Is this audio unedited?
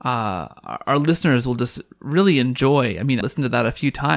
no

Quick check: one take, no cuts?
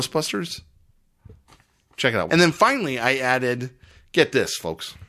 no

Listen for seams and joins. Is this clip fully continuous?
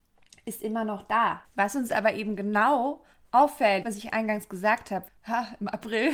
no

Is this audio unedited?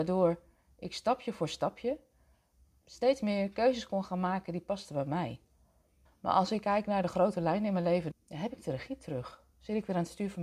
no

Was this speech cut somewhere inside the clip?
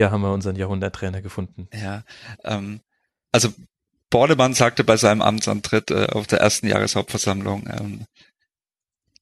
no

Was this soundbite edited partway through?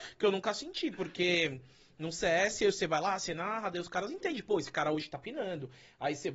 no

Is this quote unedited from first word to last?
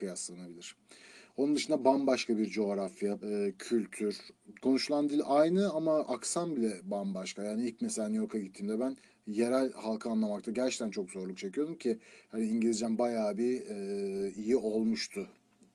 no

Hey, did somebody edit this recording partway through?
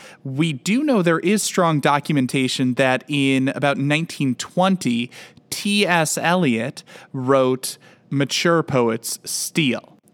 yes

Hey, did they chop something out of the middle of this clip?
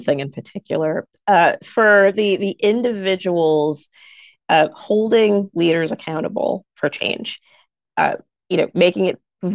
no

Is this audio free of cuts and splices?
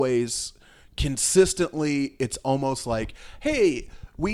yes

